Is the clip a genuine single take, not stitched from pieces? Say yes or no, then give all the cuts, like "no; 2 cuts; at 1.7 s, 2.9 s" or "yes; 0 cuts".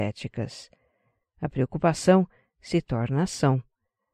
no; 1 cut; at 1.2 s